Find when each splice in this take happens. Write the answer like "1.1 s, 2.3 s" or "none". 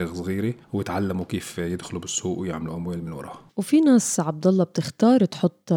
3.5 s